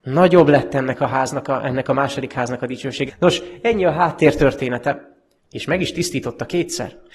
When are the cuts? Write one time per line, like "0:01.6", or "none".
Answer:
0:03.1
0:05.4